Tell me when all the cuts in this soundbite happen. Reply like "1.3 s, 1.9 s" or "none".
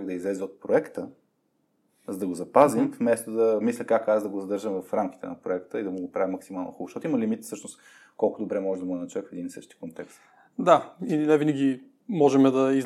none